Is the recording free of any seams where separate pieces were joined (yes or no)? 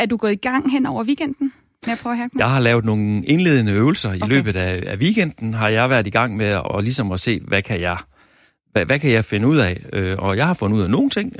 no